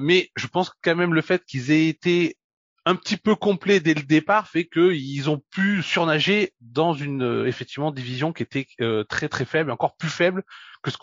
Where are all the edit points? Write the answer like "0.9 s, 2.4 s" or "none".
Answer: none